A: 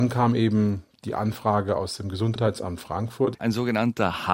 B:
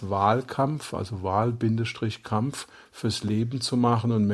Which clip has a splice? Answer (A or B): A